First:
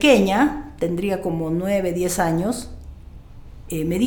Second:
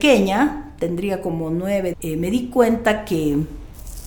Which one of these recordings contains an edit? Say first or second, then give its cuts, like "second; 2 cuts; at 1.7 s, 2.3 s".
second; 1 cut; at 1.9 s